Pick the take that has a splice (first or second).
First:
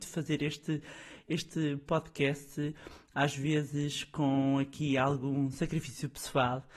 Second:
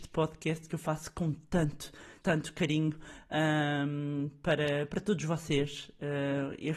second